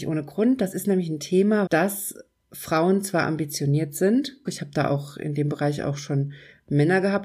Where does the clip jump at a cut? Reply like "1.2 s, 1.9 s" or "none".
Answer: 1.7 s, 4.4 s